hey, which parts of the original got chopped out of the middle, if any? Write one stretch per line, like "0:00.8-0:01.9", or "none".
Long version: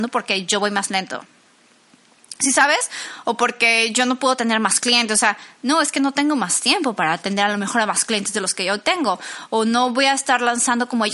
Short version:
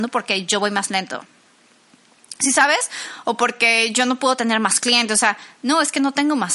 none